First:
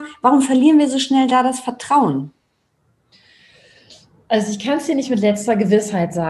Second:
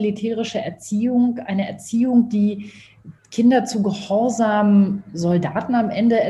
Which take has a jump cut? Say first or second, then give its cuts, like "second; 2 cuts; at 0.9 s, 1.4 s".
second; 1 cut; at 3.2 s